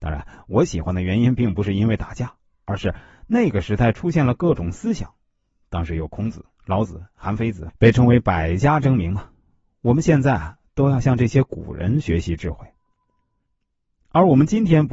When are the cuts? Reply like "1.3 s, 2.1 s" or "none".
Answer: 7.7 s